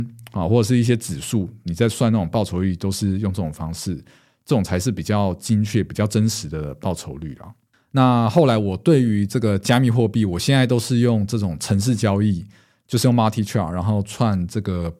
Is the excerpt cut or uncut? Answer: uncut